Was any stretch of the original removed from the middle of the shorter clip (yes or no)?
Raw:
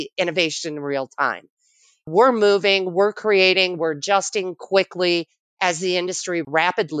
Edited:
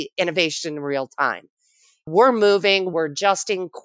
yes